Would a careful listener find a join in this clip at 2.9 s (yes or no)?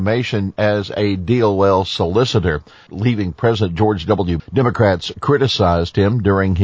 yes